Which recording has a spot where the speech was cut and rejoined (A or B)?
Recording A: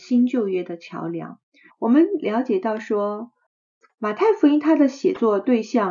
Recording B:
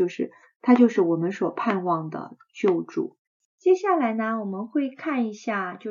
A